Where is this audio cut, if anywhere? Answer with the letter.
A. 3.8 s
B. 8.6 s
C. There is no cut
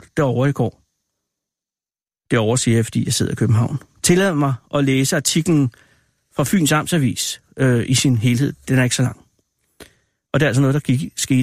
C